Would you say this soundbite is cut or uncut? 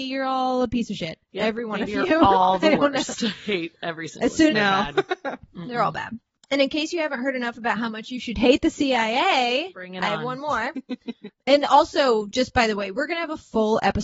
cut